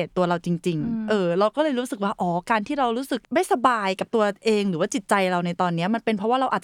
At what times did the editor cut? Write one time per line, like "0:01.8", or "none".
0:03.2